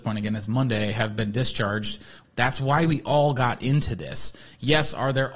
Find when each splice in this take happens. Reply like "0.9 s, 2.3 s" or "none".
2.2 s